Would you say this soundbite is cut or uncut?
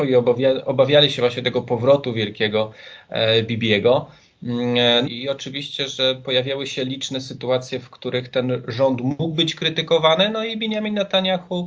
cut